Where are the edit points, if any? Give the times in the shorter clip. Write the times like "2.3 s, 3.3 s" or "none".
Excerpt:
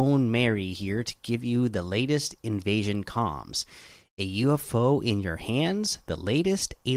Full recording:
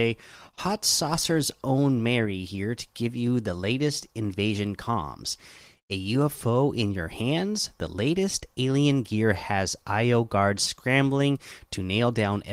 none